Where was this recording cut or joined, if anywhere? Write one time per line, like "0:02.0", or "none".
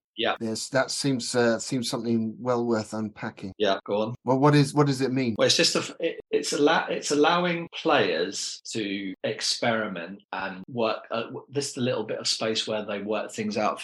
0:10.2